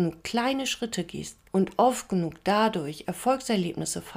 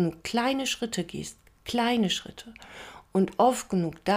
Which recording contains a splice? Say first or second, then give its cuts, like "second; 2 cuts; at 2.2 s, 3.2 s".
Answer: first; 1 cut; at 1.5 s